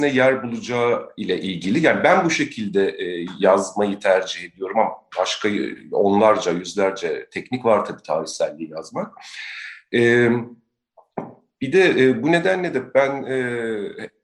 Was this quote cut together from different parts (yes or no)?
no